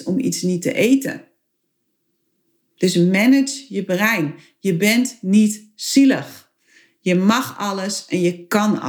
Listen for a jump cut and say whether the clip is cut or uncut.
uncut